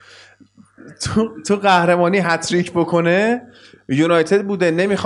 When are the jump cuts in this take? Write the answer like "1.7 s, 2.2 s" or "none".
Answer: none